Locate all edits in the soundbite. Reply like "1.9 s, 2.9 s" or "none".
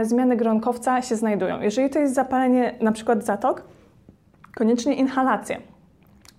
none

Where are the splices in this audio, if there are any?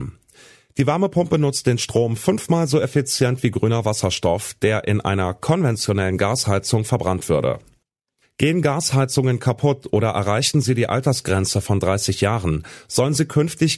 8.2 s

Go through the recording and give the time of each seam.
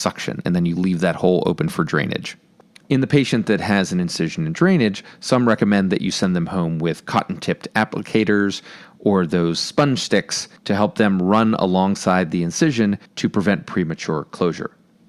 2.8 s, 10.6 s, 13.1 s

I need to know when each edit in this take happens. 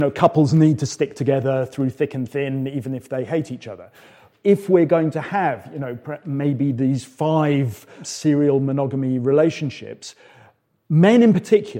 none

